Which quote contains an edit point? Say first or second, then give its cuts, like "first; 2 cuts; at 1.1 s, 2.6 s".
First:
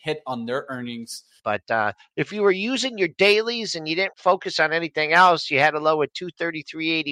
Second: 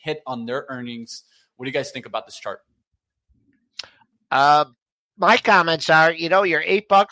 first; 2 cuts; at 1.4 s, 4.1 s